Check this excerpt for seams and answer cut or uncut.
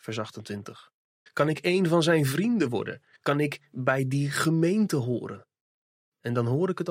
cut